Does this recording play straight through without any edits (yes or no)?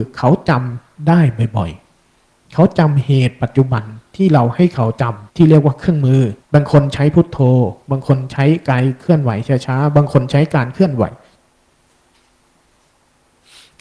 no